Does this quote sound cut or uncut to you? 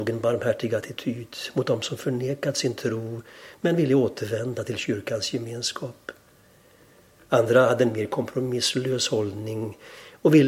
uncut